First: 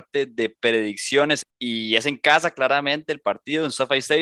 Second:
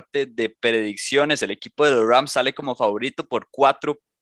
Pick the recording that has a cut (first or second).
first